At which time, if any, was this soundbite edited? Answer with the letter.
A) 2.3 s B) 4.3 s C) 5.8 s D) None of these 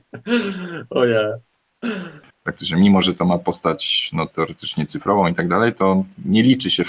A